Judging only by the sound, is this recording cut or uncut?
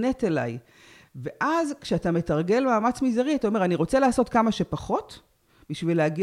uncut